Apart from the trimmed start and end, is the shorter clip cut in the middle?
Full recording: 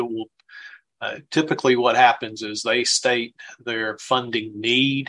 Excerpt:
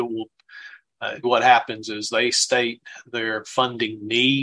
yes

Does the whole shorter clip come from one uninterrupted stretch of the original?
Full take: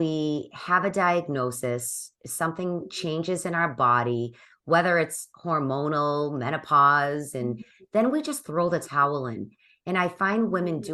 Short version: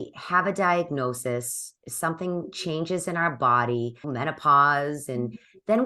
no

